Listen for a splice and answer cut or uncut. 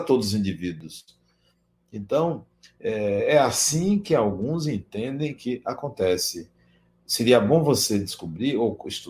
uncut